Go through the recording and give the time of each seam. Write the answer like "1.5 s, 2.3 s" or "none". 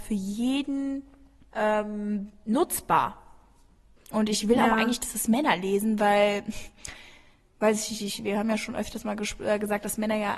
4.0 s